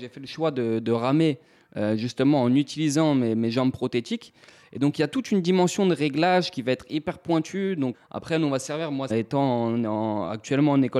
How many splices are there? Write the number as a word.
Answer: two